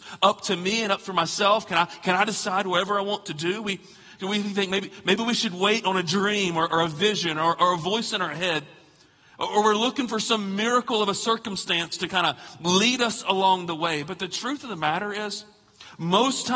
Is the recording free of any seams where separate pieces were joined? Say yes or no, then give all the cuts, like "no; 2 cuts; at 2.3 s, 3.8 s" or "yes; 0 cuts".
yes; 0 cuts